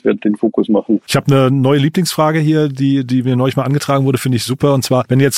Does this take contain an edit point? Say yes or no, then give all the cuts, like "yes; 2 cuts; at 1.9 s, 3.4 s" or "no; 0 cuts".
yes; 1 cut; at 1.1 s